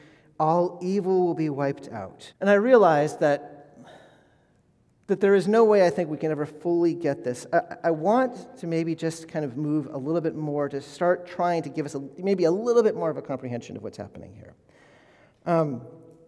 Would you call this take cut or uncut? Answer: cut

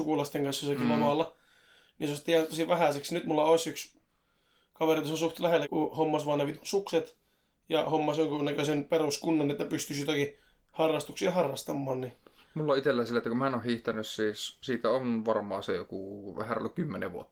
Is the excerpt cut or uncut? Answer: cut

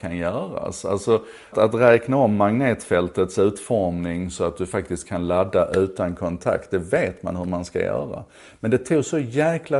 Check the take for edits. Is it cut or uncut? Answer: cut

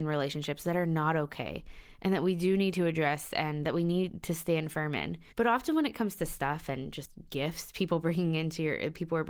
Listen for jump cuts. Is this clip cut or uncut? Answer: cut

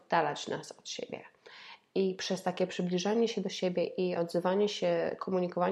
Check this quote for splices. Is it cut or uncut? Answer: uncut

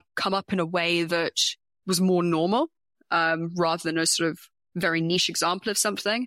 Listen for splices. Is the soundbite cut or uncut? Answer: uncut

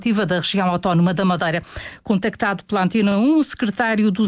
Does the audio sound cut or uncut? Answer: uncut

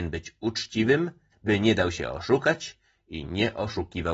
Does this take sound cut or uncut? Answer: cut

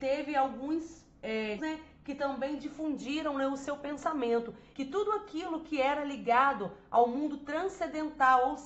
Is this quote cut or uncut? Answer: cut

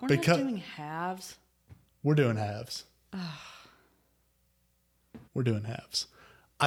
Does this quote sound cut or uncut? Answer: cut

